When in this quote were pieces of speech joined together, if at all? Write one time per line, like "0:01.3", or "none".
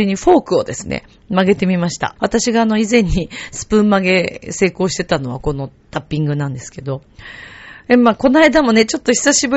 0:02.2